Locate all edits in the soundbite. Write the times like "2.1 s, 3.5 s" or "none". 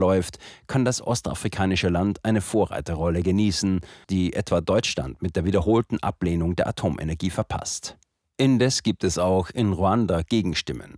4.0 s